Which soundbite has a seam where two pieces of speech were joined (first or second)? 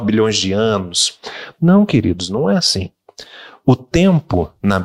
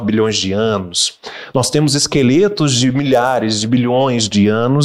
first